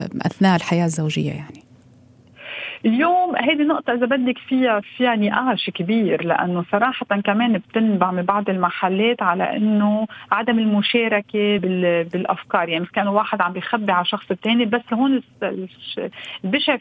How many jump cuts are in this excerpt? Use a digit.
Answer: 2